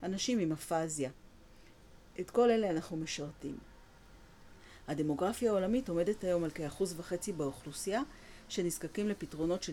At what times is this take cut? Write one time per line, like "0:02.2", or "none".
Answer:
none

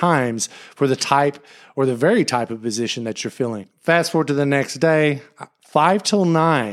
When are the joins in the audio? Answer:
none

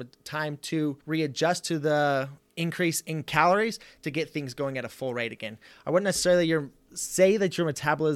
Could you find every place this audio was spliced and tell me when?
0:01.0

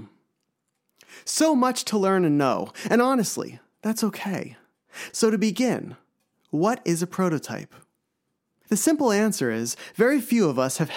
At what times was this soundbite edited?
0:05.1
0:08.6

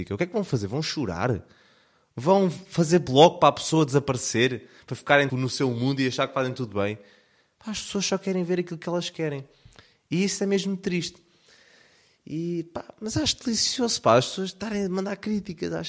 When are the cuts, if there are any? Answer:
0:05.3

